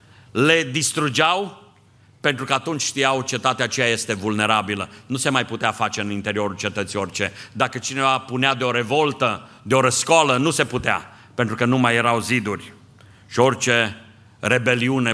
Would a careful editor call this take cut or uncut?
uncut